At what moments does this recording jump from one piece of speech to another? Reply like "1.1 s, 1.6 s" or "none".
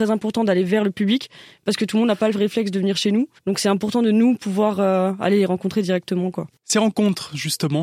3.4 s

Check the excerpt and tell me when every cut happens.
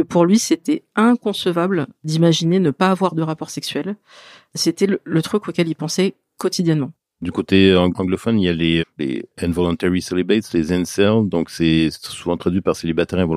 8.8 s

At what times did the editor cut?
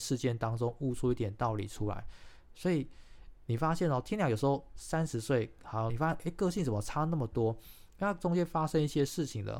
5.9 s

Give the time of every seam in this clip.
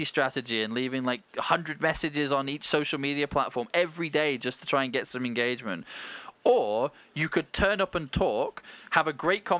none

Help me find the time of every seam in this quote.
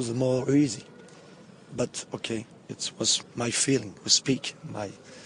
3.2 s

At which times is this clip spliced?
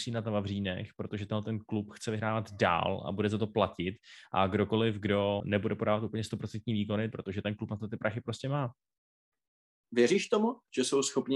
5.4 s, 7.1 s, 9.8 s

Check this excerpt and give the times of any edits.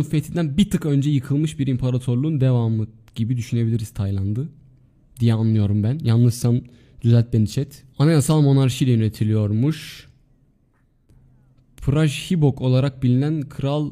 7.9 s

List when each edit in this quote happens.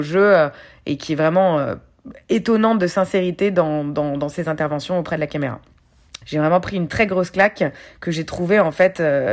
6.2 s

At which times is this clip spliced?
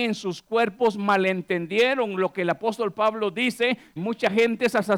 4.0 s

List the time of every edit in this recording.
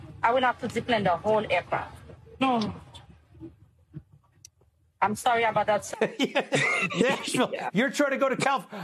5.9 s, 7.7 s

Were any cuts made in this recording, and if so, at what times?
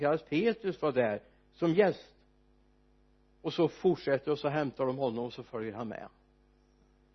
none

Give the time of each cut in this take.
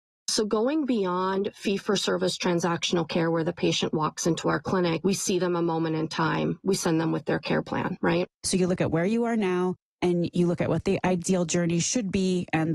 8.3 s

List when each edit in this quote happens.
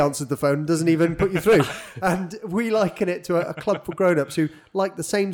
none

